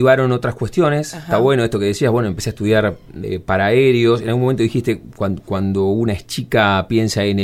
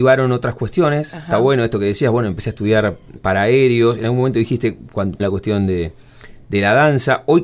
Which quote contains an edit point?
second; 2 cuts; at 3.2 s, 5.2 s

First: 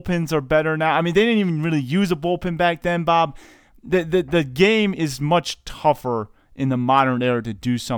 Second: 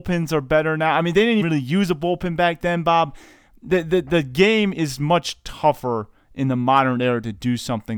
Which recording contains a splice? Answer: second; 1 cut; at 1.4 s

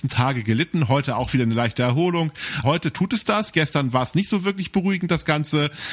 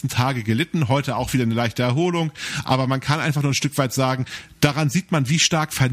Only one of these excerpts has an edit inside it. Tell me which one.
first; 1 cut; at 2.6 s

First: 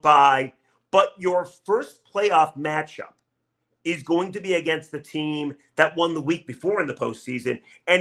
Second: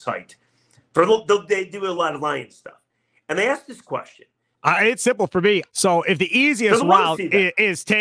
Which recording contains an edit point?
second; 2 cuts; at 4.5 s, 5.6 s

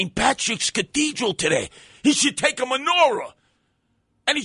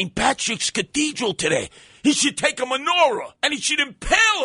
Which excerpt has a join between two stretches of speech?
second; 1 cut; at 3.4 s

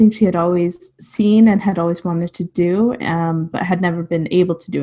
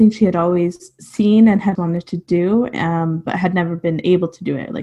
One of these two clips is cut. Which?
second; 1 cut; at 1.8 s

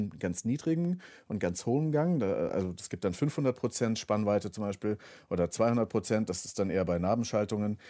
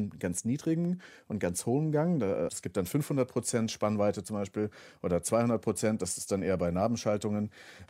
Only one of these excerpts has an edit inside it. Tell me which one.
second; 1 cut; at 2.5 s

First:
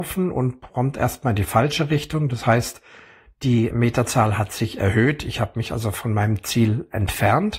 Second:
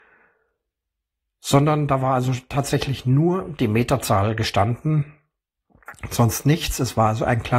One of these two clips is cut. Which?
first; 1 cut; at 3.7 s

